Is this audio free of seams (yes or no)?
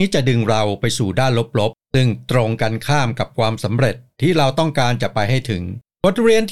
yes